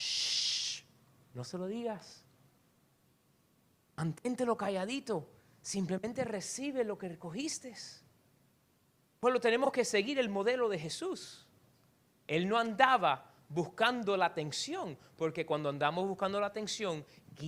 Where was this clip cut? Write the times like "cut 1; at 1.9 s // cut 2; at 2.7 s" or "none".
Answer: none